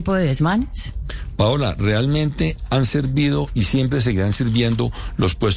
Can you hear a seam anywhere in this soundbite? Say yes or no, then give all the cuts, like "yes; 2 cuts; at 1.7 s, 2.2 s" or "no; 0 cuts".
no; 0 cuts